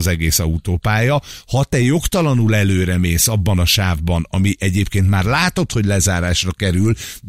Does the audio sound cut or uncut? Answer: uncut